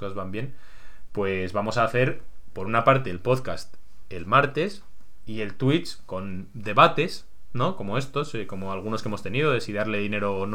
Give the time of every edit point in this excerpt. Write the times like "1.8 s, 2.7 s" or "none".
none